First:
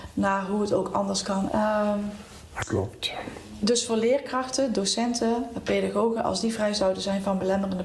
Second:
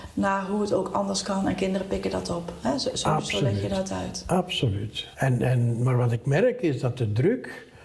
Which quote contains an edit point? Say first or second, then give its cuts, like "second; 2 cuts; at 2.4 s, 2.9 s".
first; 1 cut; at 1.5 s